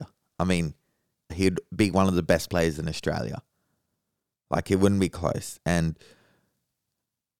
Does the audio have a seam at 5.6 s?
no; 1 cut; at 1.3 s

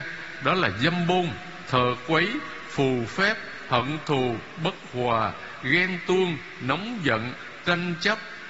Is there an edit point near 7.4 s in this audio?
no; 1 cut; at 1.7 s

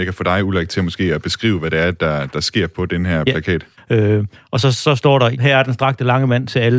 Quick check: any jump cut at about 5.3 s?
yes; 2 cuts; at 3.7 s, 5.3 s

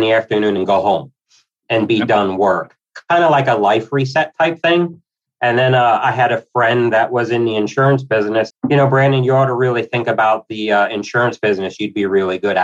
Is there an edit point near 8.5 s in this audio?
yes; 1 cut; at 8.5 s

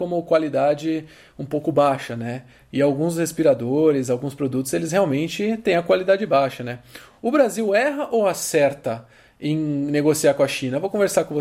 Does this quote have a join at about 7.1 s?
no; 0 cuts

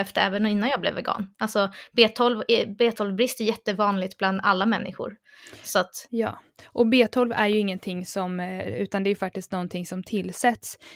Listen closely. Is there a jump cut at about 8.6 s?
yes; 1 cut; at 8.6 s

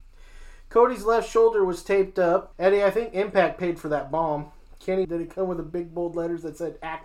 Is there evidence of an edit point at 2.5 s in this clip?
yes; 2 cuts; at 2.5 s, 5.0 s

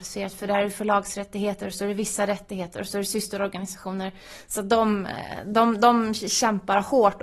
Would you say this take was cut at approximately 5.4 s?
no; 0 cuts

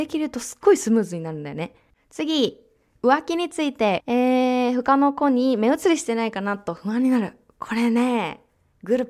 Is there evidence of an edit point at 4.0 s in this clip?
yes; 2 cuts; at 1.9 s, 4.0 s

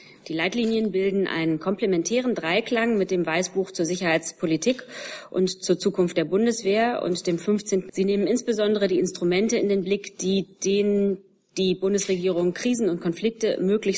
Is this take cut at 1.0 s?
no; 1 cut; at 7.9 s

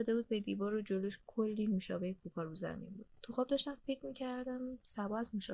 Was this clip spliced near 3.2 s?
yes; 1 cut; at 3.2 s

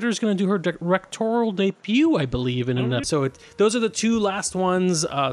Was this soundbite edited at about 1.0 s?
no; 1 cut; at 3.0 s

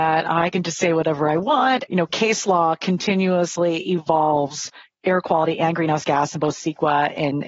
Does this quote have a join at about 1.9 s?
yes; 1 cut; at 1.9 s

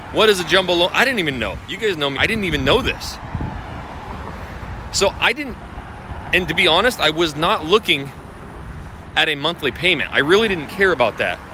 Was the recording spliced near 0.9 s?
no; 1 cut; at 2.2 s

